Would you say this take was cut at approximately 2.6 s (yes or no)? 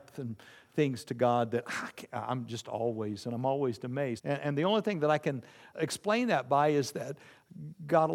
no